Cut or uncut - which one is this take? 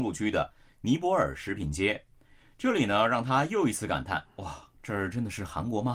uncut